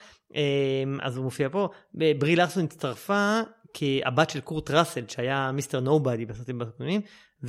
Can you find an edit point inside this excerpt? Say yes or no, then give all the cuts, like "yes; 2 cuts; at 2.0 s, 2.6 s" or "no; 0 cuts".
no; 0 cuts